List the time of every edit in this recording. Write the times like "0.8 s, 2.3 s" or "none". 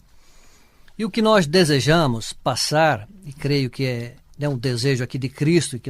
none